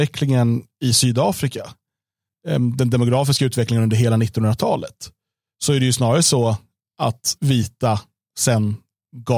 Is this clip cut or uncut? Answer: cut